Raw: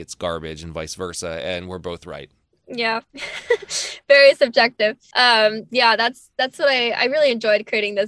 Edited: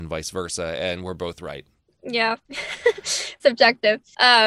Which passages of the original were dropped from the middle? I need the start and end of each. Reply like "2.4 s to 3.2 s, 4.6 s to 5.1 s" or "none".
4.0 s to 4.4 s